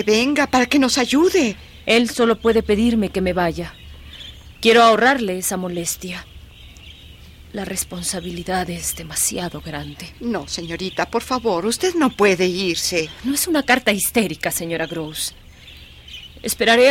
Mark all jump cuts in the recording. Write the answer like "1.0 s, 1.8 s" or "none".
none

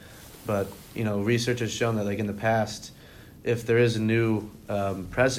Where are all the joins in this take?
none

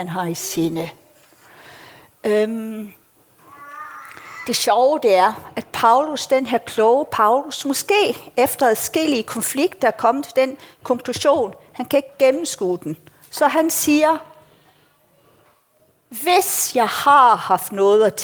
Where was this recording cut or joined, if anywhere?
none

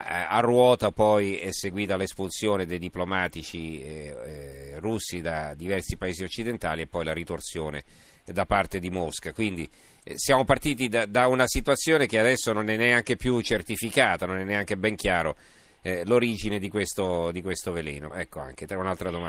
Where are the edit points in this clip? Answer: 18.1 s

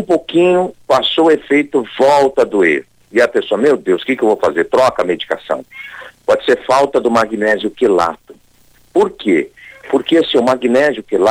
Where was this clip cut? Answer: none

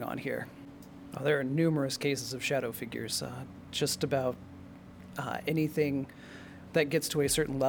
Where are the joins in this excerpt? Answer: 1.1 s

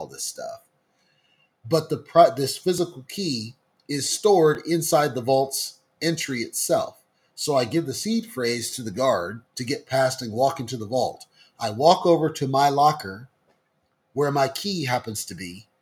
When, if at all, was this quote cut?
9.5 s

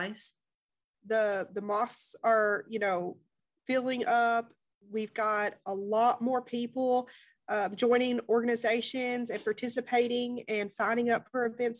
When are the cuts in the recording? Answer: 0.9 s

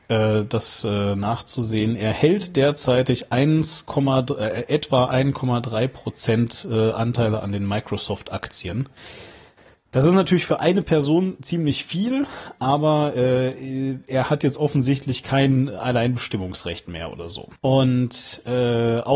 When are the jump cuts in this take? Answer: 17.6 s

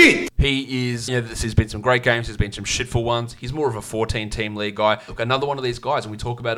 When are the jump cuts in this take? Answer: 1.1 s, 5.1 s

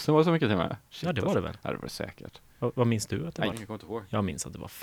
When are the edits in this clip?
3.5 s

